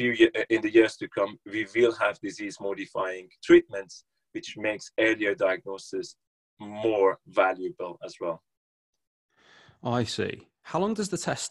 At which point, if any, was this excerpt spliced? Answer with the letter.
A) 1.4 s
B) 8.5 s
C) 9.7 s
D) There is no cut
D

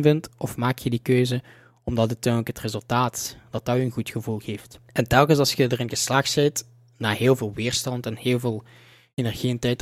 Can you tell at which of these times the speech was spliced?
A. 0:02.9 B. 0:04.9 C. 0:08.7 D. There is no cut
B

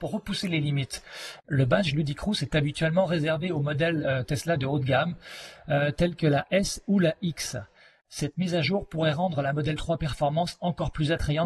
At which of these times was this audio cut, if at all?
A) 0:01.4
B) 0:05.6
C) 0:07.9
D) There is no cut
D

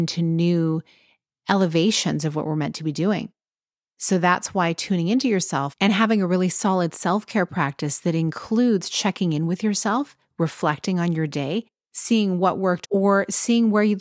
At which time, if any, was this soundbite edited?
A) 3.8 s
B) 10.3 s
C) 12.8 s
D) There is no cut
C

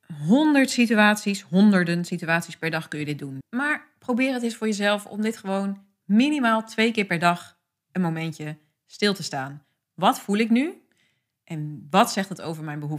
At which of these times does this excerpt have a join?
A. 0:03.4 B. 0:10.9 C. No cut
A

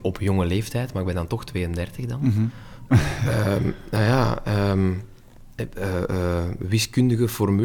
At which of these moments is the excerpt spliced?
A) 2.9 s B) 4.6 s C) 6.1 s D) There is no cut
A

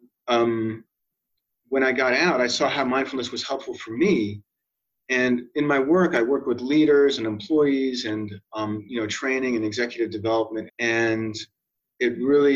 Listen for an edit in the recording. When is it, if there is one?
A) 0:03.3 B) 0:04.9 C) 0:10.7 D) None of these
C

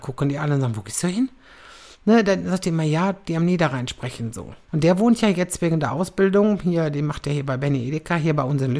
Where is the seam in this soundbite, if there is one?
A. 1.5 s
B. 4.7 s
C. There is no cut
B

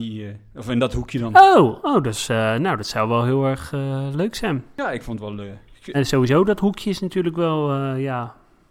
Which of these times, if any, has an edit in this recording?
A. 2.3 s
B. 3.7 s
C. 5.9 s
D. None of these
C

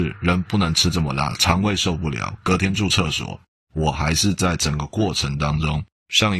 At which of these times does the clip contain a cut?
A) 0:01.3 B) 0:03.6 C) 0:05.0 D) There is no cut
D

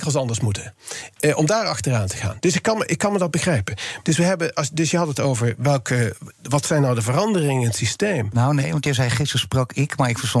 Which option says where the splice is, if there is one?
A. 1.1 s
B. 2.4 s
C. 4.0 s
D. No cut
C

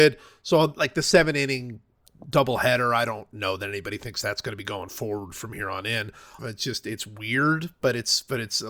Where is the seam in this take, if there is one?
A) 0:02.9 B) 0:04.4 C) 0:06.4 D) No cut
C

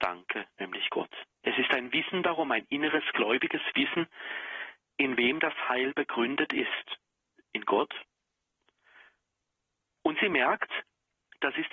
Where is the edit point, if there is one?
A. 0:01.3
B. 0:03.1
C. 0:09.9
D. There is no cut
A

